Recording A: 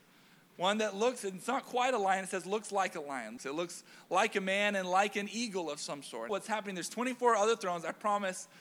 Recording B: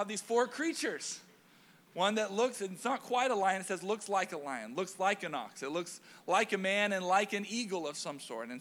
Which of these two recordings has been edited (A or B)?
A